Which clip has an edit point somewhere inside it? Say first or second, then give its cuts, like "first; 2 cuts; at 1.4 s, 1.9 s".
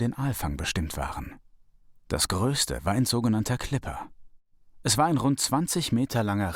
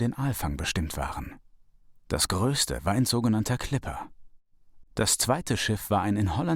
second; 1 cut; at 4.8 s